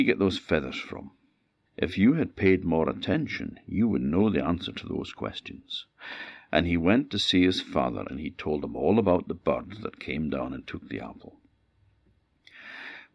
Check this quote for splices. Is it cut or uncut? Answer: cut